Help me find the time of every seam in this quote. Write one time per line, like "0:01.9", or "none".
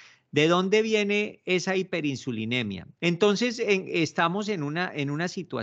0:02.9